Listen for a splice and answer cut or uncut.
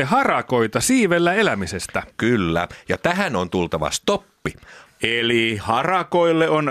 cut